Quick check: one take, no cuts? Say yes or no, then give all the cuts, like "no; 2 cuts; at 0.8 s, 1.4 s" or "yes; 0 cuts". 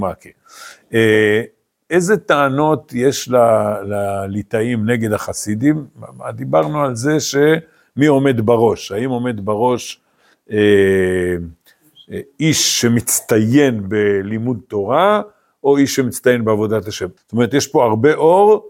no; 1 cut; at 17.2 s